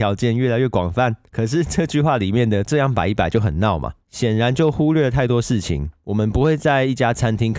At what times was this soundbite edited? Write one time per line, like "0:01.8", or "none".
none